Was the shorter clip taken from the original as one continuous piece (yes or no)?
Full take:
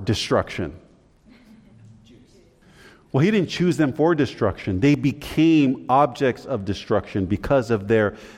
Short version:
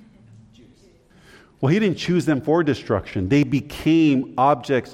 yes